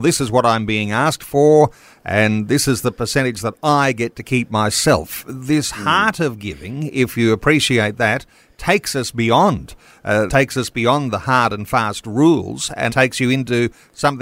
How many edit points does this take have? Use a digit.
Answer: 2